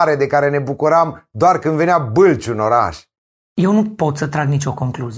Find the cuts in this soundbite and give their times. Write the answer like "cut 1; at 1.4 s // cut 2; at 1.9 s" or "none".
cut 1; at 3.4 s

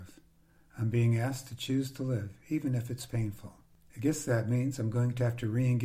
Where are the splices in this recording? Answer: none

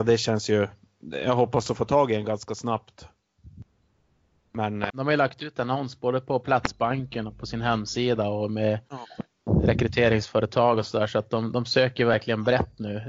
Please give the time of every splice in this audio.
cut 1; at 4.9 s

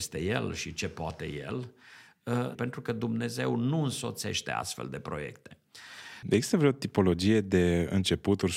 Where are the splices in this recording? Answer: cut 1; at 2.5 s // cut 2; at 6.2 s

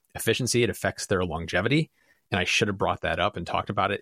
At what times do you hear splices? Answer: none

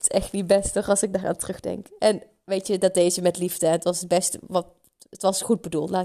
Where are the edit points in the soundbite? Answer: none

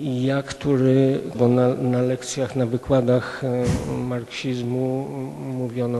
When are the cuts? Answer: cut 1; at 1.3 s

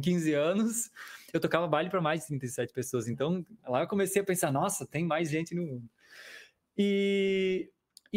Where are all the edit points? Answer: none

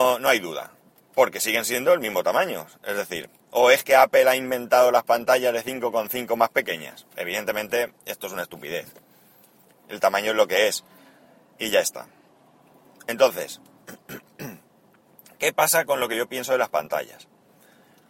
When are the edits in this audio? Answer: none

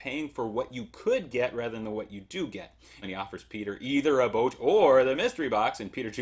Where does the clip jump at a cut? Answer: cut 1; at 3.0 s

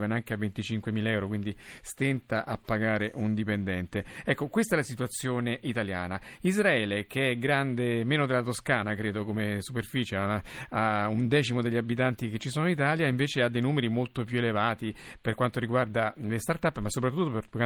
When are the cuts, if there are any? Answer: none

